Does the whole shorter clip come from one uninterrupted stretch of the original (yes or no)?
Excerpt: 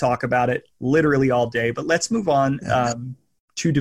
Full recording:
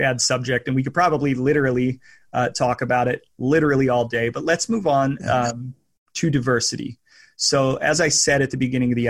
yes